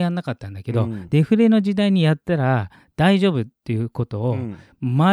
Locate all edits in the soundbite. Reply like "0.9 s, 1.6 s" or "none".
1.1 s